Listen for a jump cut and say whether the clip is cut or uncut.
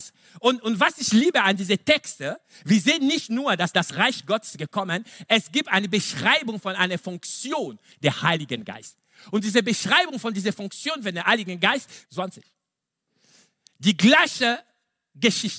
cut